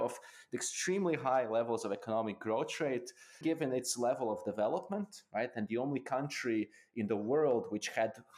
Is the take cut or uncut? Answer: cut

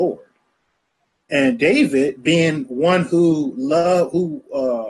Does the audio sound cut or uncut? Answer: cut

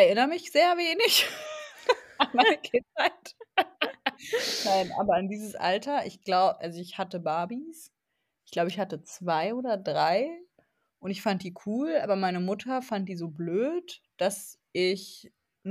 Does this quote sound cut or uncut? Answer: uncut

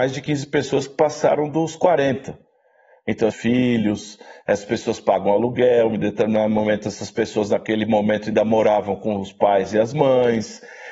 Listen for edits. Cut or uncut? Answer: cut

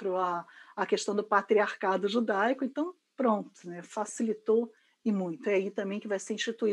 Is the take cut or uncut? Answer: uncut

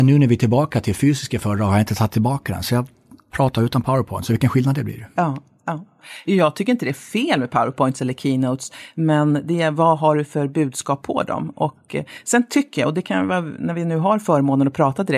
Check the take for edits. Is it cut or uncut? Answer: uncut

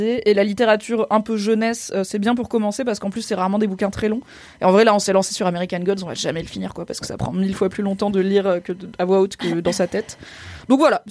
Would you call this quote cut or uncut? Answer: uncut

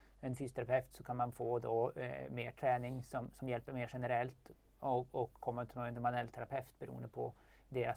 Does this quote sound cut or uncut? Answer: uncut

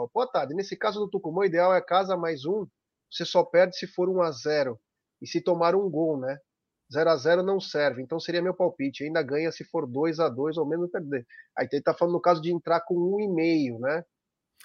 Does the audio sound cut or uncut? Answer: uncut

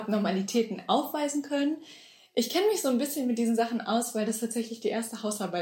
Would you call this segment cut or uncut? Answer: uncut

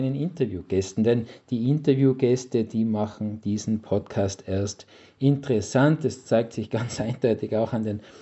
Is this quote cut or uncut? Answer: uncut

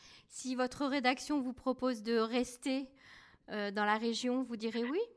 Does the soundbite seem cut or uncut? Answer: uncut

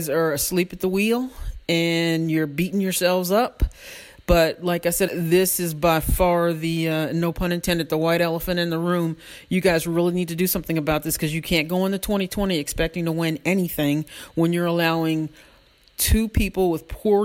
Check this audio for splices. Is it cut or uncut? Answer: cut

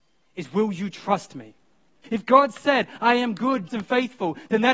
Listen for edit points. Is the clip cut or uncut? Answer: cut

